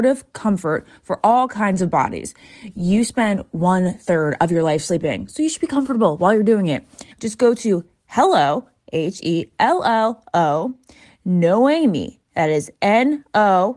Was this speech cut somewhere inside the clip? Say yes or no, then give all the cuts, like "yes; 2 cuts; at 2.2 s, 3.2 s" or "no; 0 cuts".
yes; 1 cut; at 7.1 s